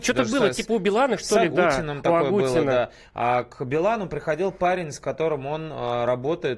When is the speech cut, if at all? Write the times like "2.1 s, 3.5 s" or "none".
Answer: none

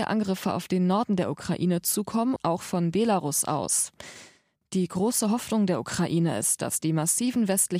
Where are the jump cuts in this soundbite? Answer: 2.4 s, 4.6 s

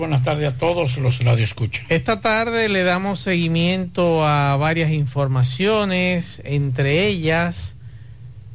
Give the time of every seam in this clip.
none

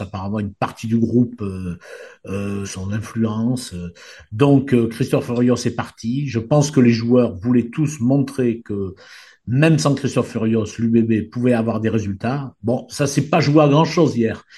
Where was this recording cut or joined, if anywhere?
2.6 s

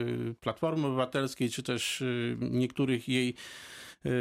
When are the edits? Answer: none

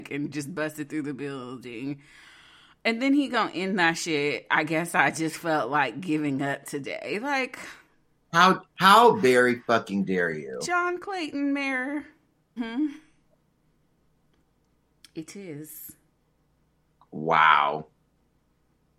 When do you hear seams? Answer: 12.6 s

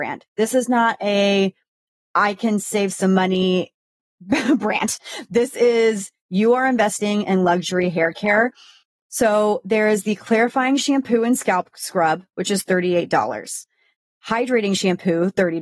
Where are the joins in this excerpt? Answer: none

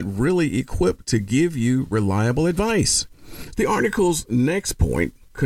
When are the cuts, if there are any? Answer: 3.5 s

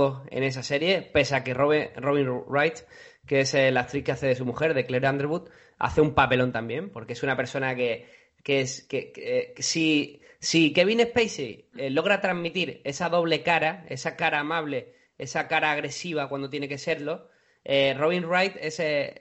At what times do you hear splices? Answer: none

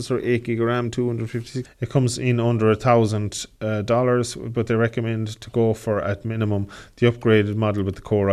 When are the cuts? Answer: 1.6 s

